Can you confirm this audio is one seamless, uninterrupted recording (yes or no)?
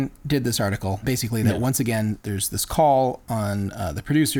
yes